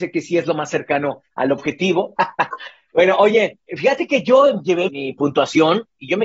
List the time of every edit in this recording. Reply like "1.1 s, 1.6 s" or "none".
2.2 s, 3.7 s, 4.9 s